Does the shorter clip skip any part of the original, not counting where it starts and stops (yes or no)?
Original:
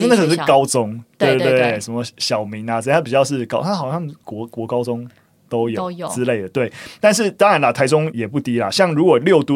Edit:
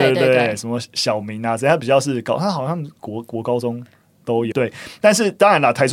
yes